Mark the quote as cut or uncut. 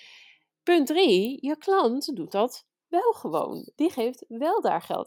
uncut